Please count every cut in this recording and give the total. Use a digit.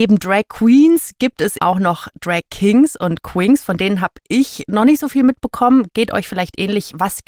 1